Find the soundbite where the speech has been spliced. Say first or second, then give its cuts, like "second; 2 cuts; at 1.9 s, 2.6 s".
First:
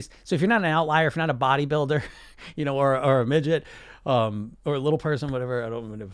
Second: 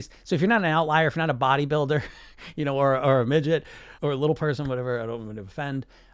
second; 1 cut; at 4.0 s